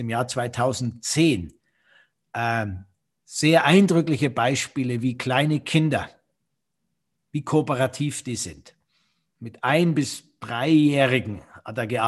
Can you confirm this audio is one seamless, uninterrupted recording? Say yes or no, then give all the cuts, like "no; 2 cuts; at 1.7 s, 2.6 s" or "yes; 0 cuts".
yes; 0 cuts